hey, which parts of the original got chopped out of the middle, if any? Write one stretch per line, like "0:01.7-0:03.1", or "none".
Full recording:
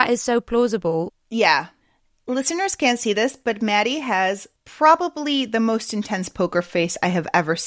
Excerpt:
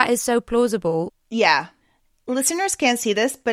none

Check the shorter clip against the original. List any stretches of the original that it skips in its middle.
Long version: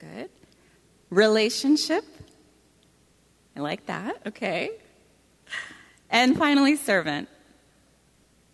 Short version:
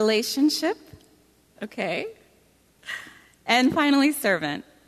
0:02.8-0:04.2

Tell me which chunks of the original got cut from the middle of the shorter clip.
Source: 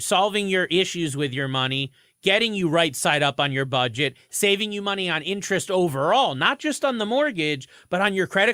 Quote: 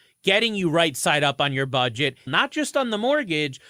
0:04.3-0:06.3

